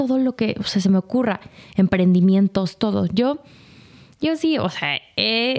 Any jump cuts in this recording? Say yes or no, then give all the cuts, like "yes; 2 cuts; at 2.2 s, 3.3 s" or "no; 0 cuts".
no; 0 cuts